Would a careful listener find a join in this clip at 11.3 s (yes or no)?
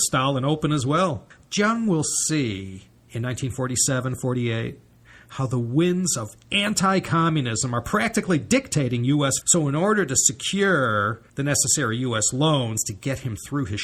yes